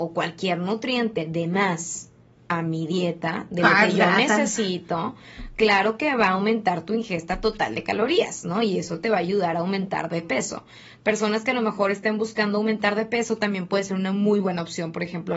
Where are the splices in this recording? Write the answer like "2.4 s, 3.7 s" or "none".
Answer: none

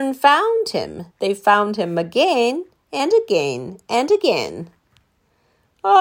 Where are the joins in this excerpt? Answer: 1.1 s

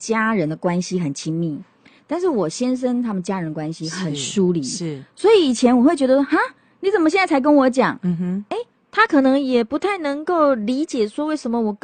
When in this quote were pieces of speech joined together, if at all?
none

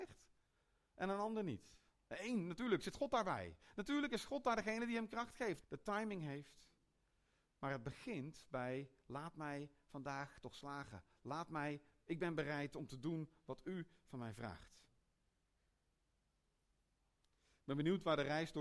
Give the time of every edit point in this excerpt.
5.6 s

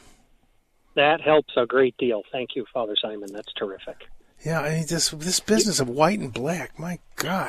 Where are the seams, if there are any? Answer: none

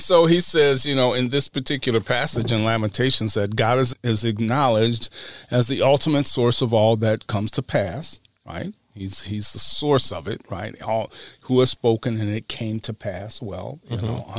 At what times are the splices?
3.9 s

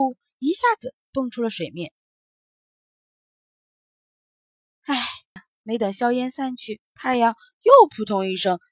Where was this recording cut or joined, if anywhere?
5.4 s, 6.9 s

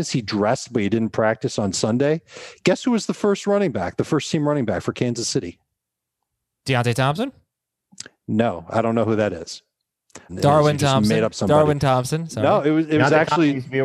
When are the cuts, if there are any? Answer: 10.3 s

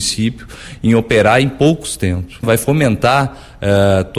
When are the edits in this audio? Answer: 2.4 s

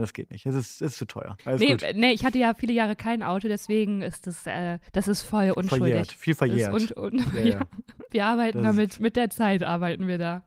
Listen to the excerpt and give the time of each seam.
1.4 s, 4.9 s, 8.1 s

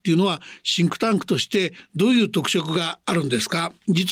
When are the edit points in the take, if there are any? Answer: none

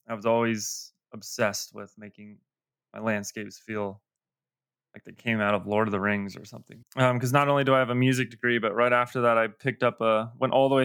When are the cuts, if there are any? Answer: 6.8 s

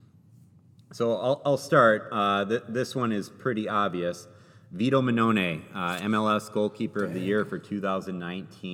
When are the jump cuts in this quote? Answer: none

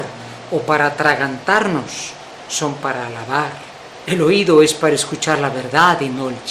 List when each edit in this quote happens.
4.0 s

